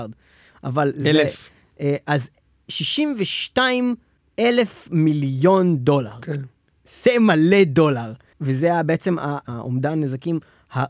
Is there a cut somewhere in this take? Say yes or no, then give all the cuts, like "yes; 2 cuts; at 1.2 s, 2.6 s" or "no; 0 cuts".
no; 0 cuts